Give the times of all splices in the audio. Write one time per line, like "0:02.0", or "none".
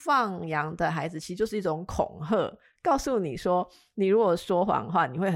none